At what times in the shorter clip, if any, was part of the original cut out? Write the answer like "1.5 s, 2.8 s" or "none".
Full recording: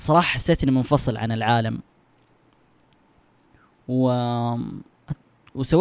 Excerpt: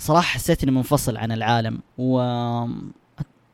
1.9 s